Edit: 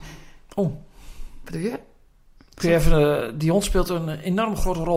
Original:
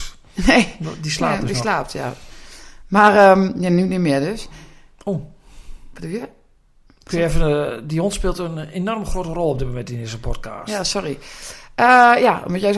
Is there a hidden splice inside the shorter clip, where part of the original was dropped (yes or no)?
no